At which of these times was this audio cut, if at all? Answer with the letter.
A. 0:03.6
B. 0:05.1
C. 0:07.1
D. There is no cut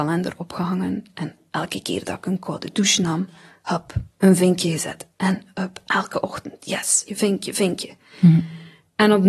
C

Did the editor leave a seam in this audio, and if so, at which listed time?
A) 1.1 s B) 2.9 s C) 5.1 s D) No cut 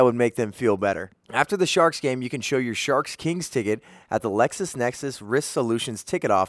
A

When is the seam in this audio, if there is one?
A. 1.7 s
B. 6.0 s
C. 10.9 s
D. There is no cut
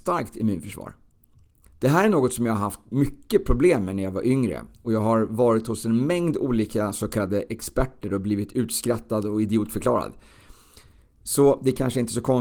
A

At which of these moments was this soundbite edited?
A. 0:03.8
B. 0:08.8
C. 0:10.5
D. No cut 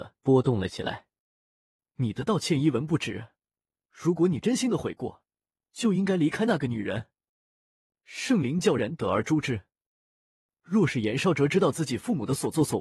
B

